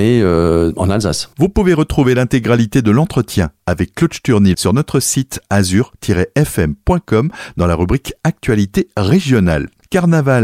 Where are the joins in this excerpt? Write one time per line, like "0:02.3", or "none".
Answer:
0:04.5